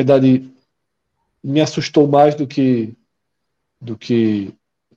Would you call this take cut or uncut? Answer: uncut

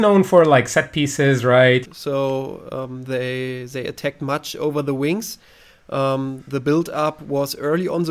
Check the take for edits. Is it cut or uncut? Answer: cut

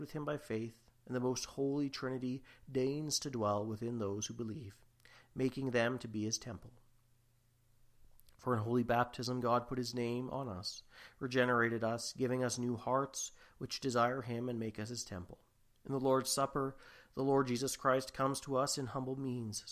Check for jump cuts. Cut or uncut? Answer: uncut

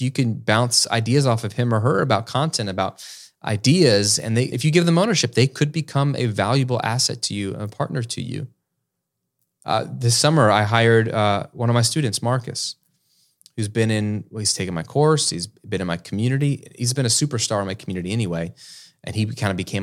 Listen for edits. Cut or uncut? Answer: cut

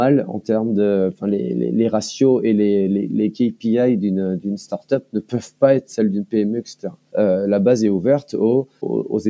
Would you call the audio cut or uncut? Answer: cut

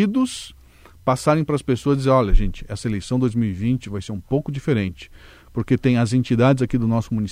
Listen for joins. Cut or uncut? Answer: uncut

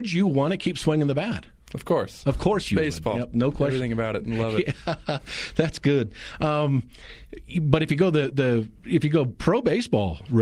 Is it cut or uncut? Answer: uncut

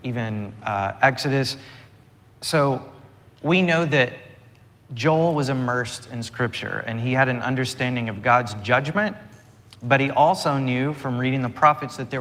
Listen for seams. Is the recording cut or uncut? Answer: uncut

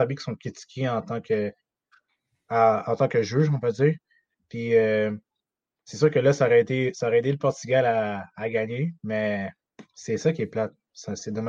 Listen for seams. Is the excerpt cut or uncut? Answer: uncut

